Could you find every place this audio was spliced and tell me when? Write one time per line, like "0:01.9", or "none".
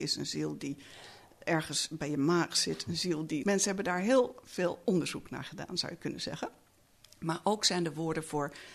0:03.4